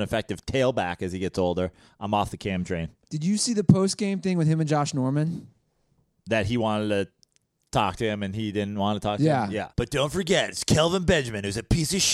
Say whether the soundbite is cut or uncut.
cut